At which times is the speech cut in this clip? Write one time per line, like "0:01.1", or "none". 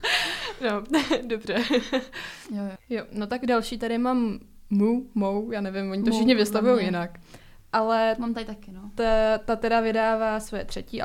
none